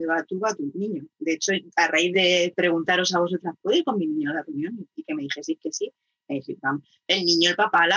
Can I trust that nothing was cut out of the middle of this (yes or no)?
no